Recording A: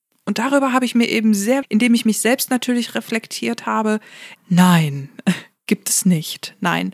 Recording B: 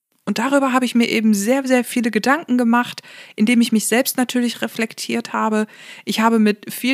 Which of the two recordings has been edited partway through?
A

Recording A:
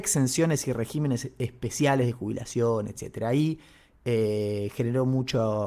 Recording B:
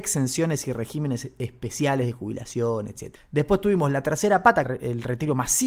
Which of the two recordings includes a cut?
B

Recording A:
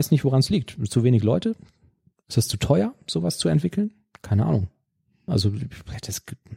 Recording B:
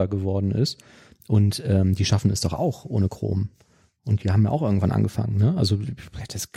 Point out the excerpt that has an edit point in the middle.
A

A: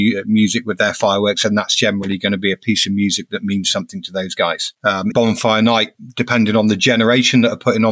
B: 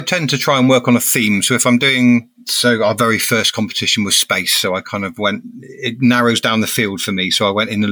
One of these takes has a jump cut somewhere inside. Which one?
A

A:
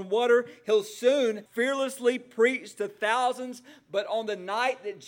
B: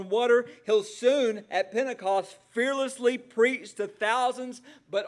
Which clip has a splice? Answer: A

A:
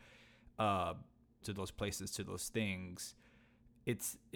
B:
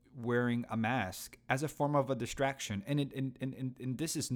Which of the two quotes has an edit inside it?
A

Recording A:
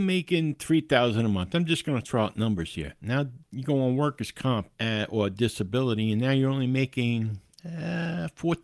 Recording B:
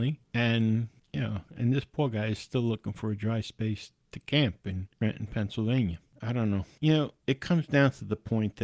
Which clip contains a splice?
A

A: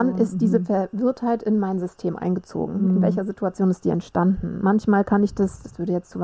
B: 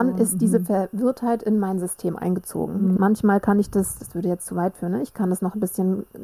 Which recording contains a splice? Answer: B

